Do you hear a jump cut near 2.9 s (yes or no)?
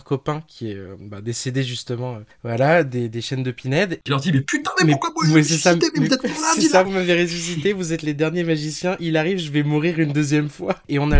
no